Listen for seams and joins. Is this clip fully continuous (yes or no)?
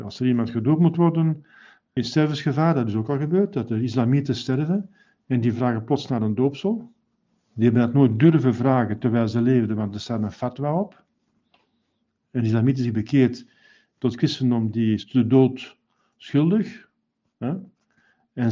no